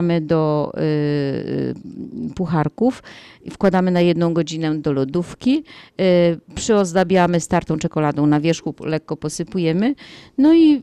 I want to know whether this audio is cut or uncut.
uncut